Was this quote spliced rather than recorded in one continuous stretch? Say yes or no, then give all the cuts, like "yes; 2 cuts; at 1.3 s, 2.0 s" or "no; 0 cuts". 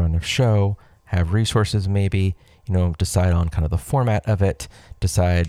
no; 0 cuts